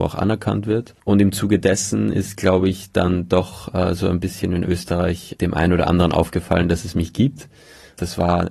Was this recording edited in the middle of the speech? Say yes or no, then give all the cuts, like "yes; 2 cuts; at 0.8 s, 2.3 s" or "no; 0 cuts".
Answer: no; 0 cuts